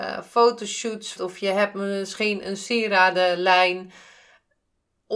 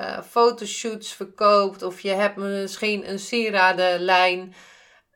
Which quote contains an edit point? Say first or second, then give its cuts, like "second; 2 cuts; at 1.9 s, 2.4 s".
first; 1 cut; at 1.2 s